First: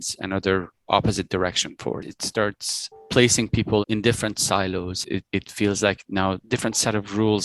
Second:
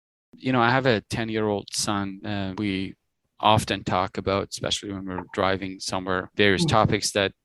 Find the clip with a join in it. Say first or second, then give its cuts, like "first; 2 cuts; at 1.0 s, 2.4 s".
first; 2 cuts; at 2.0 s, 5.0 s